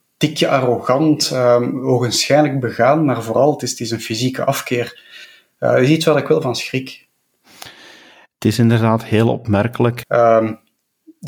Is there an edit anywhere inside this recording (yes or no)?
yes